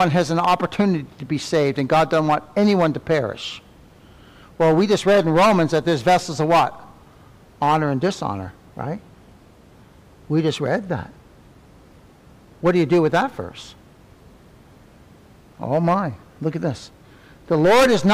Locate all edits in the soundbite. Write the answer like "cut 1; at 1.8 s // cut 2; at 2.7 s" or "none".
none